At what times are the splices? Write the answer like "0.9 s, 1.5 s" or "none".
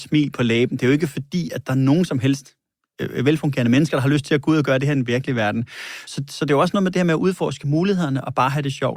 none